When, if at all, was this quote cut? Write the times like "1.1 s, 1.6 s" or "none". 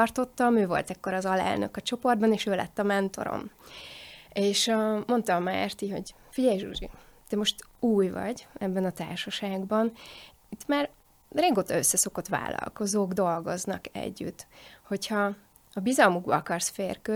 none